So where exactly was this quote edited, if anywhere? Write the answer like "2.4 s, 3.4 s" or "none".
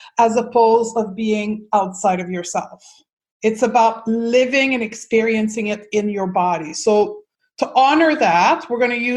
none